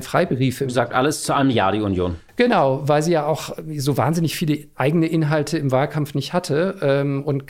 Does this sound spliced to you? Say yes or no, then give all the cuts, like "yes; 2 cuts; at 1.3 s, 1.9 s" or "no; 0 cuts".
no; 0 cuts